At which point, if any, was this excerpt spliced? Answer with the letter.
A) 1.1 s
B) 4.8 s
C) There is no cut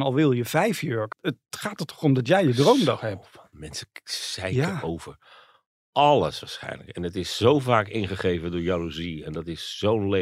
A